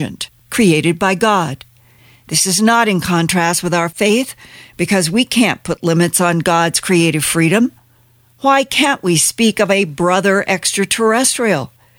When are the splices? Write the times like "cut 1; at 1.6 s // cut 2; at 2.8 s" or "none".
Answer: none